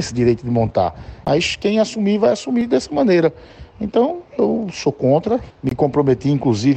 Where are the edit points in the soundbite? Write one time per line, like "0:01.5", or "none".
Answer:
0:01.2
0:05.5

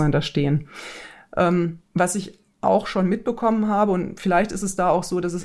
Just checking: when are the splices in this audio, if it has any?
0:01.8

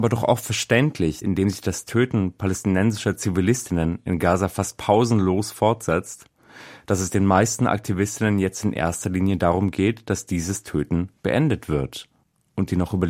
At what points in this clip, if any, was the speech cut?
0:01.2

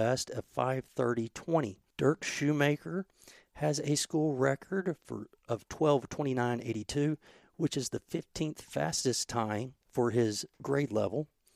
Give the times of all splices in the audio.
0:01.9
0:09.8

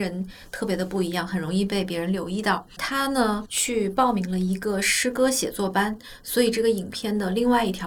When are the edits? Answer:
none

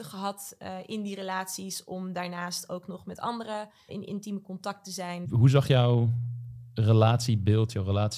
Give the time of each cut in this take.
0:03.9
0:05.2

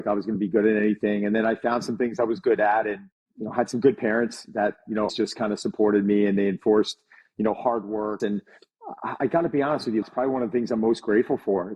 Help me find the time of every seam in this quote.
0:05.1
0:08.2
0:10.0

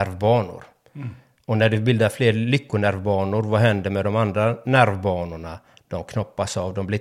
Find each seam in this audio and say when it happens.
none

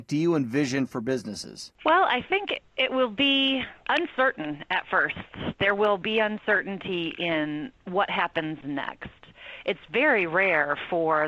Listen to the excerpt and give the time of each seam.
0:03.8

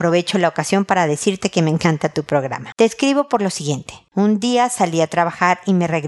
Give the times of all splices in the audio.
0:02.7
0:04.1

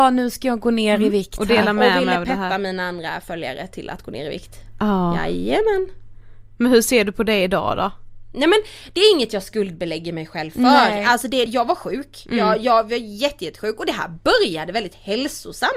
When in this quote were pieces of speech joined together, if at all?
0:11.5

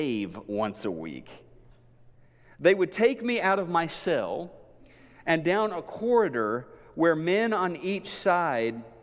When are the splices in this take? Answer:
none

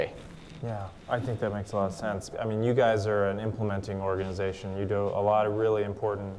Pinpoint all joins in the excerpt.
0:02.3

